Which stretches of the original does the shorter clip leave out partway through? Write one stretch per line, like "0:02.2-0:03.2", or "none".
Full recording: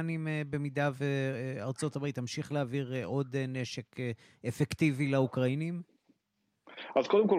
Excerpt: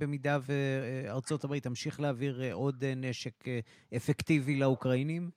none